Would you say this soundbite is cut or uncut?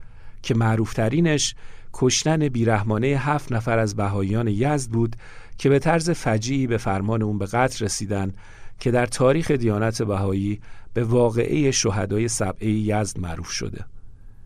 uncut